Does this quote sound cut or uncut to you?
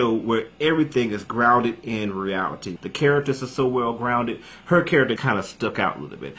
cut